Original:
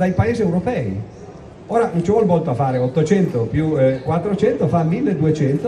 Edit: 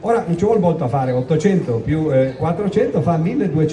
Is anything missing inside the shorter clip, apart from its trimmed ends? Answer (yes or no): no